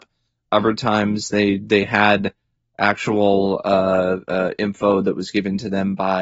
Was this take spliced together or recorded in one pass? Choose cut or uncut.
uncut